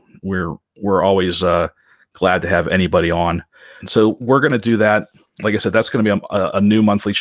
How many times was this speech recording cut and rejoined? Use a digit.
1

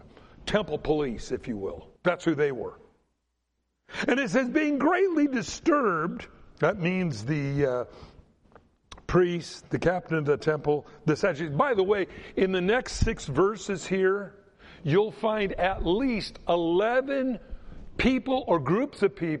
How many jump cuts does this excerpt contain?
2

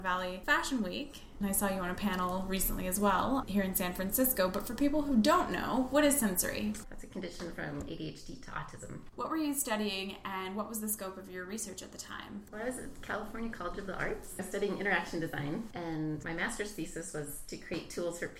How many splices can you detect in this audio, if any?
2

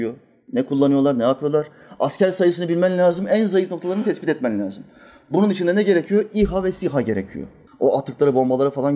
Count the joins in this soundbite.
1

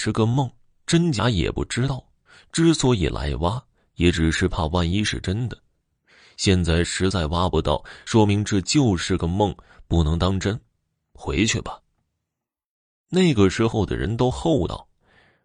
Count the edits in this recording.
0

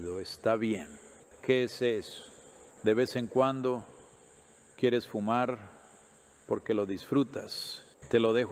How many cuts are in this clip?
1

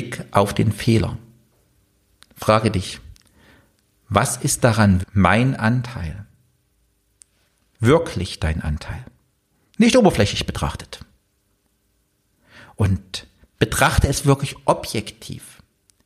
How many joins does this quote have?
1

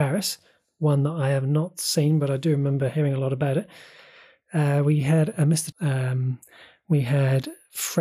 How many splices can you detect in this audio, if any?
1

